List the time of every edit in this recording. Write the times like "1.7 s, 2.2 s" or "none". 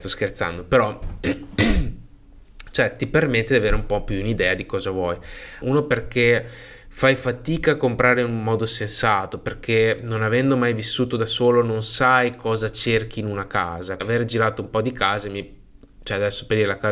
5.6 s, 14.0 s